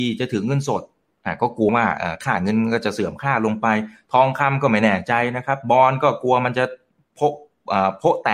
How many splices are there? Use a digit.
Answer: 1